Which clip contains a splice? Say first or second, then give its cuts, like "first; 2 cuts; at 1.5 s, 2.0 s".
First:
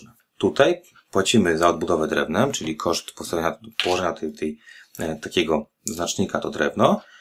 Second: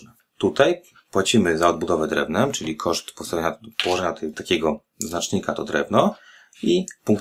second; 1 cut; at 4.3 s